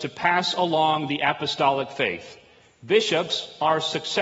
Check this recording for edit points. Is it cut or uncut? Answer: uncut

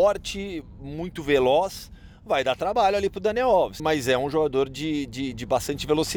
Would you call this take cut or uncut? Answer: cut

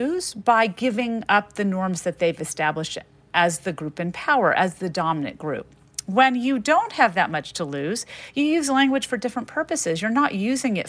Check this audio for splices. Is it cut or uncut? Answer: uncut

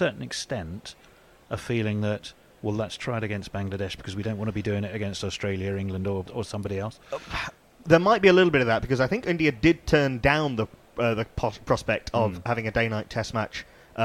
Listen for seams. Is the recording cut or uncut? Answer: cut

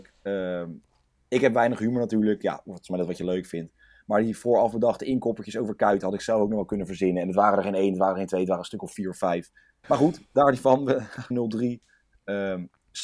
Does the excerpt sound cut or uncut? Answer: cut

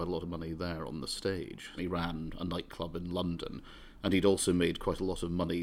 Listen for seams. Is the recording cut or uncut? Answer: cut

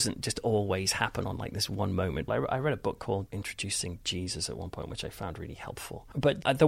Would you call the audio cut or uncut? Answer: cut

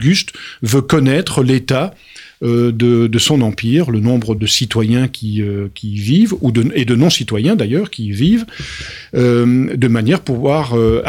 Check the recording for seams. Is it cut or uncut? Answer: cut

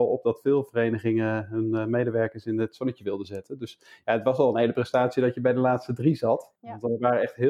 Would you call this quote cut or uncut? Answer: uncut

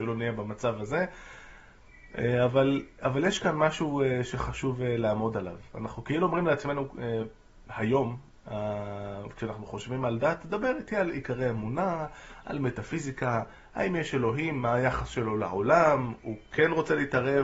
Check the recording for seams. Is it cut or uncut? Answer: uncut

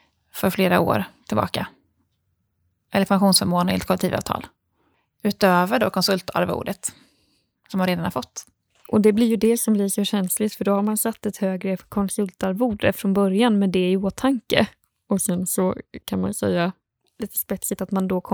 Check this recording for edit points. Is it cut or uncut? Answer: uncut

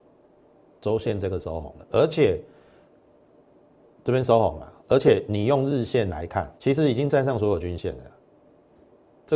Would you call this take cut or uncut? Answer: cut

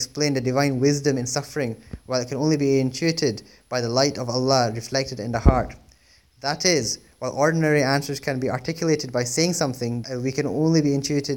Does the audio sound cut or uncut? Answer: cut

